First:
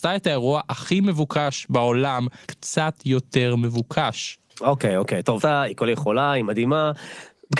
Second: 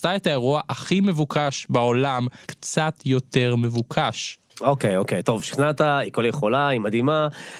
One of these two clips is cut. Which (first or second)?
first